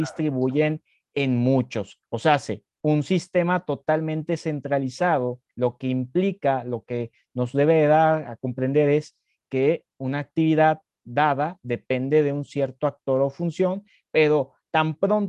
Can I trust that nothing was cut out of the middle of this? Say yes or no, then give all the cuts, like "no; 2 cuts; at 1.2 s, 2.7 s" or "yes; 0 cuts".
yes; 0 cuts